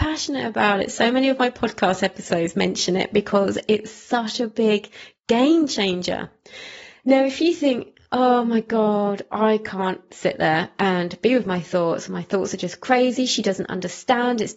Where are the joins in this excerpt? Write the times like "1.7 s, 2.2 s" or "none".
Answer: none